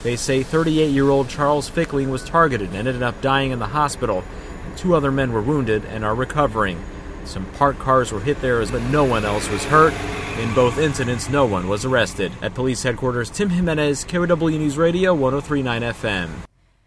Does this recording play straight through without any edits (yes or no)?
no